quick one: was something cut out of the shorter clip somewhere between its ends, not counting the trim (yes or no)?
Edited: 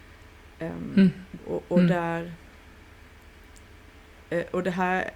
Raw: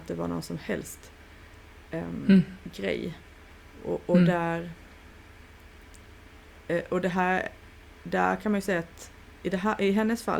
yes